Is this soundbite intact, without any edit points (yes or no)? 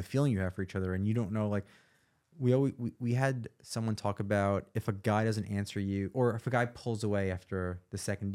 yes